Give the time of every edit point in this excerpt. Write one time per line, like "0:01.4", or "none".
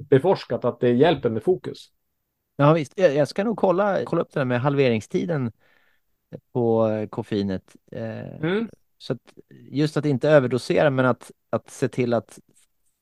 0:04.0